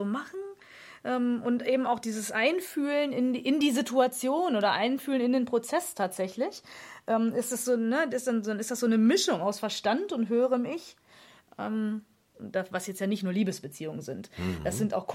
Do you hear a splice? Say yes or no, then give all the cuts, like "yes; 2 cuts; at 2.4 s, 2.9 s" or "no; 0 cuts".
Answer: yes; 1 cut; at 12.3 s